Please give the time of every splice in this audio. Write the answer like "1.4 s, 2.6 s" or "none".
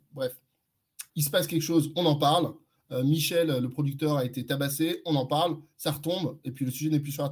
1.1 s